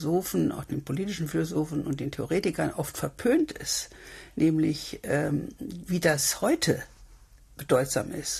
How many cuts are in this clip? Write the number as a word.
one